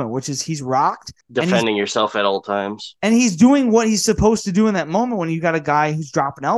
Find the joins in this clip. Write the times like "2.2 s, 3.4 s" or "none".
1.2 s